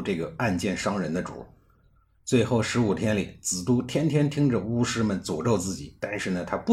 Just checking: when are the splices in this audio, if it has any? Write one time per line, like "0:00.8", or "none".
none